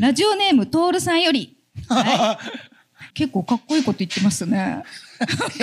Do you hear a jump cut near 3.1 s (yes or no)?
yes